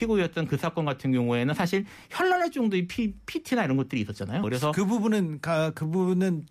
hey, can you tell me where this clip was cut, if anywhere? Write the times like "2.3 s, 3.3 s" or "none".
4.4 s